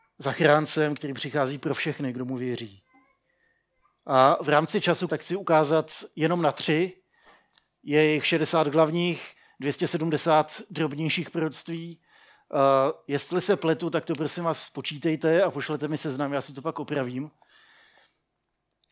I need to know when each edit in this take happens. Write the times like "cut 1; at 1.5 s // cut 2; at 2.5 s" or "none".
cut 1; at 5.1 s